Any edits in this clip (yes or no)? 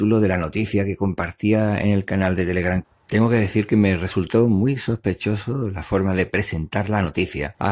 yes